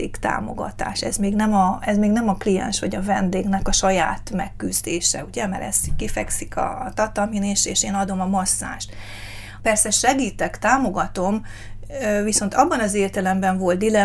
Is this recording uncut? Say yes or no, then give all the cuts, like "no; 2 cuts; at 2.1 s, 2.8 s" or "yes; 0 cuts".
no; 1 cut; at 9.6 s